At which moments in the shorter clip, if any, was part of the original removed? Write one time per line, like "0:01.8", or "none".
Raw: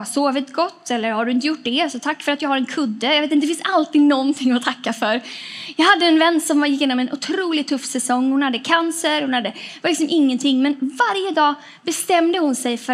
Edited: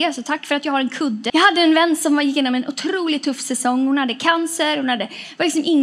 0:01.3

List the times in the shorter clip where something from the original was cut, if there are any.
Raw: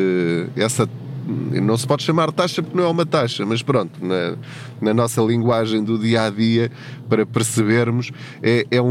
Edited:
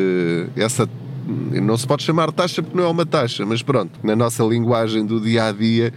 0:04.0

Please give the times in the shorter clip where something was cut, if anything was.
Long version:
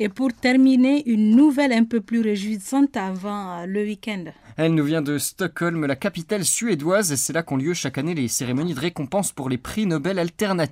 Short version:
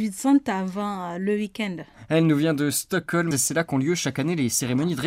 0:03.3

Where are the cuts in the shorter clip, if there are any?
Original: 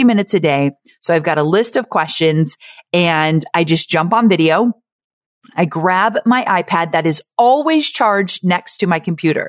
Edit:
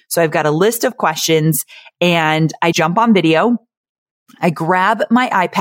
0:02.7

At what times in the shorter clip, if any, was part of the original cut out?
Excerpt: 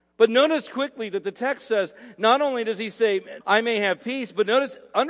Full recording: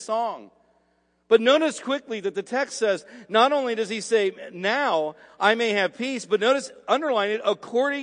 0:03.4

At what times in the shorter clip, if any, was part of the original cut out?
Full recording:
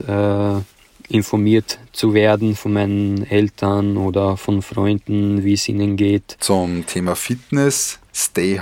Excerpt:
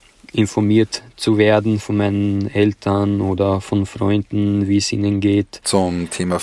none

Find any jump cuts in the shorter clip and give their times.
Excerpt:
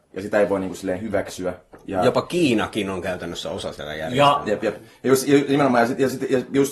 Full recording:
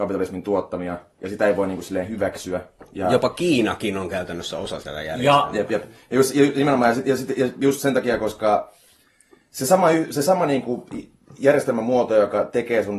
none

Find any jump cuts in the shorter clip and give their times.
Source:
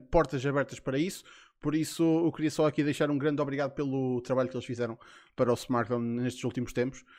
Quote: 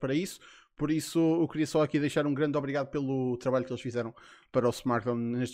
none

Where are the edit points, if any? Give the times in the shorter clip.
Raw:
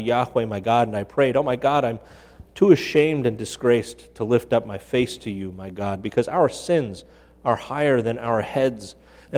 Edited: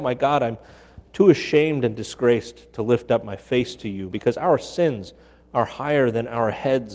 0:04.1

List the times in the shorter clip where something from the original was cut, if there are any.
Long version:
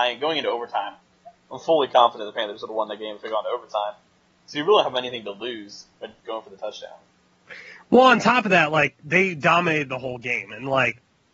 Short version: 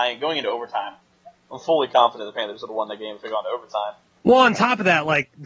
0:04.2

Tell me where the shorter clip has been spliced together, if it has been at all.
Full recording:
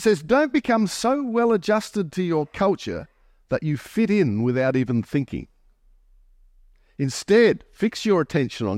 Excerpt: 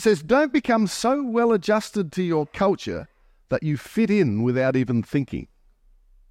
none

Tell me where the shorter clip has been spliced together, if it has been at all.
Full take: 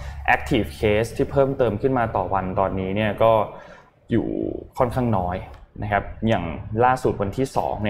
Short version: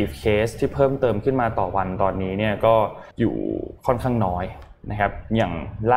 0:03.1

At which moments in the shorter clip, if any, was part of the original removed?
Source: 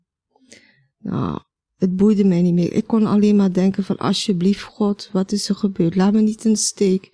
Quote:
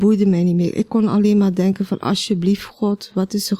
none

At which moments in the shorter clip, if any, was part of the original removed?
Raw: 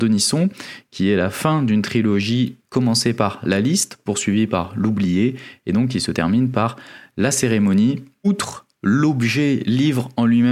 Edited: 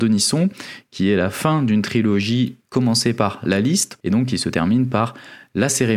0:04.0

